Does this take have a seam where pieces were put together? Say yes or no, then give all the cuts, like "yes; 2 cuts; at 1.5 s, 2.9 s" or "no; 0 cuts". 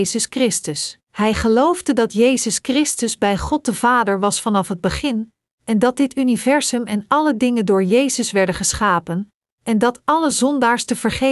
yes; 1 cut; at 1.0 s